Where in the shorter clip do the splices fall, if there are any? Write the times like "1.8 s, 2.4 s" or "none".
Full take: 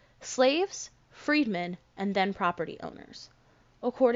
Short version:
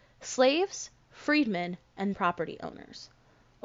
2.1 s